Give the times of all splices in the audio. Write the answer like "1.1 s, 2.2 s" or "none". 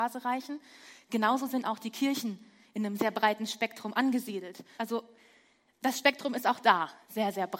3.0 s, 4.8 s